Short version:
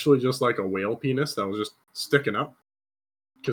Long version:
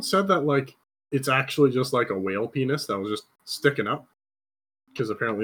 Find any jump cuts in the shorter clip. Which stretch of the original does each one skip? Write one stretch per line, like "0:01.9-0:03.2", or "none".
none